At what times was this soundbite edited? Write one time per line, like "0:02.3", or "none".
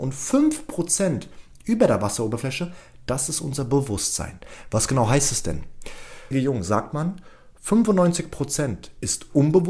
0:06.3